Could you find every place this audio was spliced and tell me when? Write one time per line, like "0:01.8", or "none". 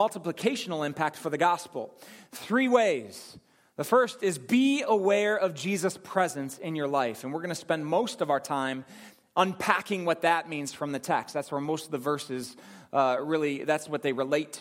none